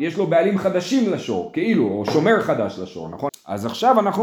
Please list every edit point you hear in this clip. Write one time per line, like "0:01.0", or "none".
0:03.3

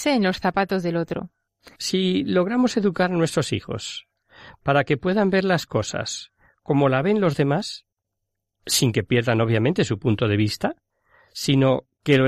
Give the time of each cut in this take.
0:01.7

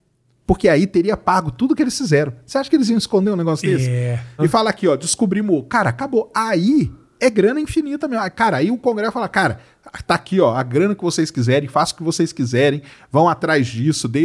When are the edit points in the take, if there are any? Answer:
0:04.4

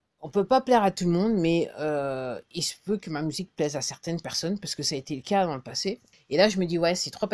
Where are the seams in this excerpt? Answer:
0:06.1

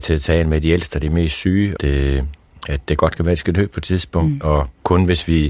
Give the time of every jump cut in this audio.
0:01.8

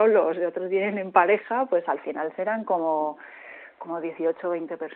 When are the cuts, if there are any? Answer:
none

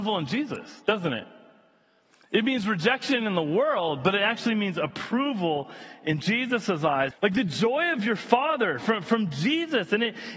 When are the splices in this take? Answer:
0:07.1

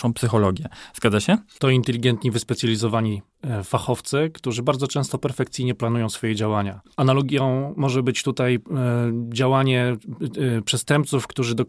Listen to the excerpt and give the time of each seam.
0:01.6

